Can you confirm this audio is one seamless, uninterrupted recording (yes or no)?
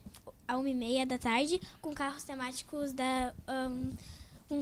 yes